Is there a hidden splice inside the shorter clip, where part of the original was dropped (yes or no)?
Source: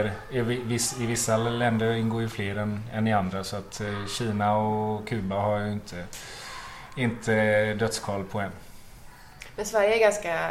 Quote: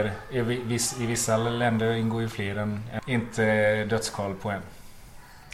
yes